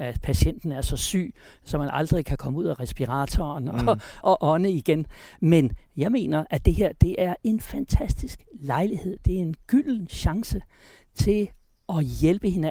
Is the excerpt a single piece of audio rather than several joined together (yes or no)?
no